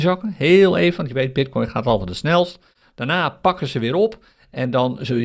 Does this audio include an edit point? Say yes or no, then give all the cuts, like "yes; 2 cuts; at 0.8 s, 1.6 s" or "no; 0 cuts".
no; 0 cuts